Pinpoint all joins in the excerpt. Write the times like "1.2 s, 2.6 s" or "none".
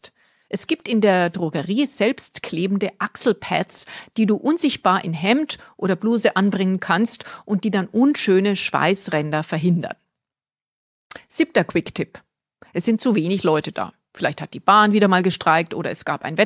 none